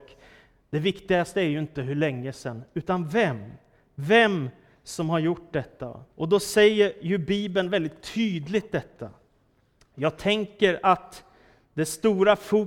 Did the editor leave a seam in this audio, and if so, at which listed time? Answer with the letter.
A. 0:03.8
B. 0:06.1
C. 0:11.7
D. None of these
B